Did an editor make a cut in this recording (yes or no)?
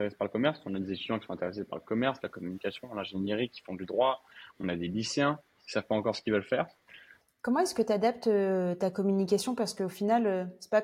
yes